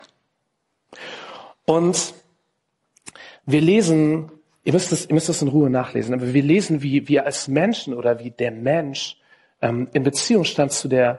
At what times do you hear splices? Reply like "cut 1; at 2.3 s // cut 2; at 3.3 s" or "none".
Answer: none